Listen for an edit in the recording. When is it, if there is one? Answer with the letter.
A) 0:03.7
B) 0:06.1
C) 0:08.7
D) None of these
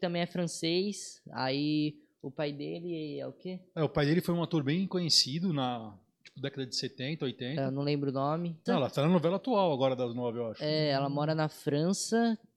C